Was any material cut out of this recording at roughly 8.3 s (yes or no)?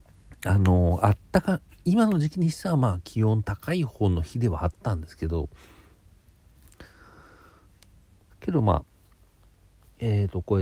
yes